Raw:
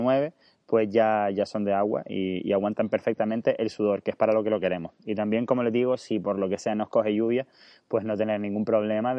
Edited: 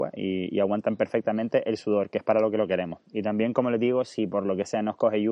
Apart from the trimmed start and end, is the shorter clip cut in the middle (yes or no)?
no